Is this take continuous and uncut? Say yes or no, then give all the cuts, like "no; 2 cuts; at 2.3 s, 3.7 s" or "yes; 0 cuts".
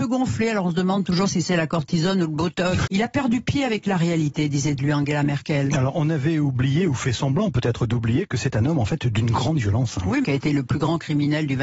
no; 2 cuts; at 2.9 s, 10.2 s